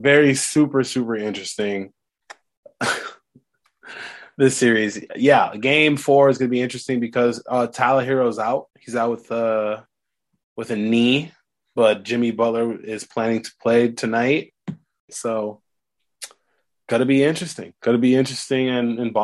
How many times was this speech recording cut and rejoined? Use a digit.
2